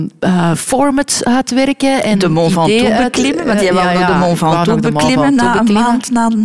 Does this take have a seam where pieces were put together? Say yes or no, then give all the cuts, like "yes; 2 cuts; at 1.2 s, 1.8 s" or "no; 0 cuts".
no; 0 cuts